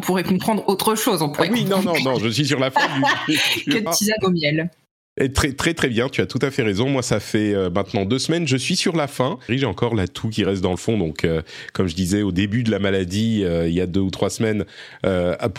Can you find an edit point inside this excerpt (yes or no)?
yes